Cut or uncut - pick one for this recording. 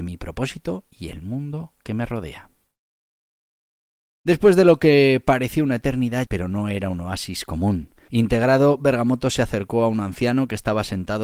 cut